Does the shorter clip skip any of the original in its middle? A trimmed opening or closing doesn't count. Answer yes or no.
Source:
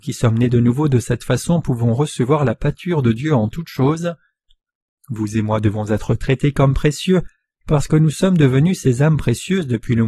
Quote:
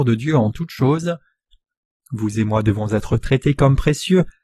no